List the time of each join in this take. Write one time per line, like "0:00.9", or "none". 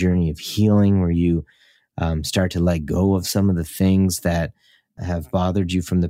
none